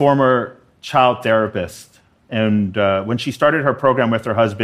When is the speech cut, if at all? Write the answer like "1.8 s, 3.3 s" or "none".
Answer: none